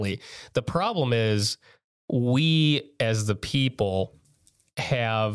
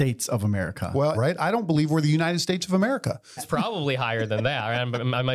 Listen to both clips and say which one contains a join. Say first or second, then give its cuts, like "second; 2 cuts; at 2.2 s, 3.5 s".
second; 2 cuts; at 1.1 s, 3.4 s